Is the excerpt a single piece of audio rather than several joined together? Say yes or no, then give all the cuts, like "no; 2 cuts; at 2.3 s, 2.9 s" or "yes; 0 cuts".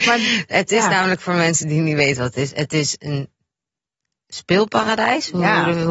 yes; 0 cuts